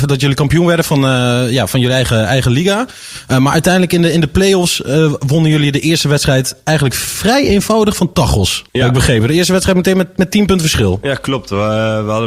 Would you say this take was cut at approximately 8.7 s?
yes; 1 cut; at 8.7 s

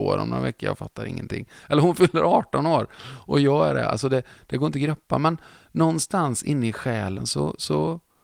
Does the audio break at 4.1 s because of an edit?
no; 0 cuts

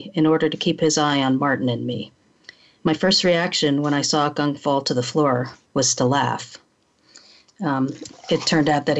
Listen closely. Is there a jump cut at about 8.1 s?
yes; 1 cut; at 8.1 s

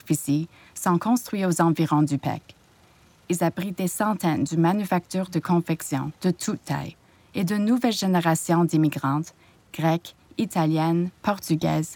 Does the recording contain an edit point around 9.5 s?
no; 0 cuts

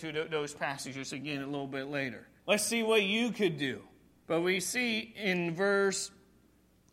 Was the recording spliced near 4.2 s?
yes; 2 cuts; at 2.4 s, 4.2 s

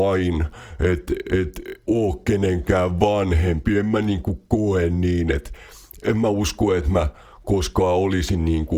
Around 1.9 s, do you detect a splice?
yes; 1 cut; at 1.9 s

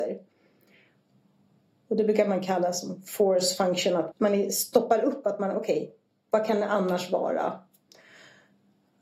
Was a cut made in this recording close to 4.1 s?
yes; 1 cut; at 4.1 s

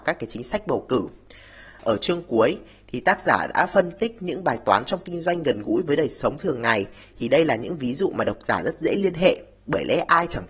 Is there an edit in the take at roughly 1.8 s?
yes; 1 cut; at 1.8 s

